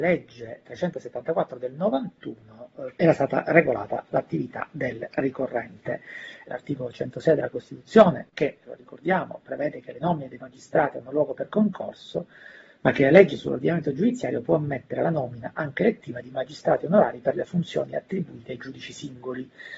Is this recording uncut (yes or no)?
no